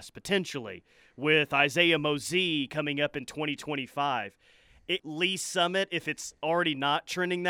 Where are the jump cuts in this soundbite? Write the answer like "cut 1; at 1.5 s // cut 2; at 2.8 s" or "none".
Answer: cut 1; at 5.0 s